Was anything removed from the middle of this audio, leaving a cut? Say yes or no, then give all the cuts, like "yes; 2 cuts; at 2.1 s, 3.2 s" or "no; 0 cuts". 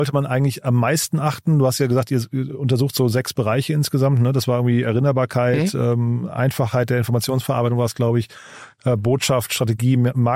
no; 0 cuts